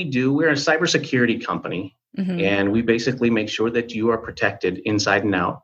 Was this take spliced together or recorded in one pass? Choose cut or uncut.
uncut